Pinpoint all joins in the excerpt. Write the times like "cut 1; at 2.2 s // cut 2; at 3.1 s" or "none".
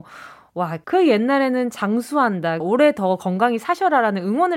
cut 1; at 2.6 s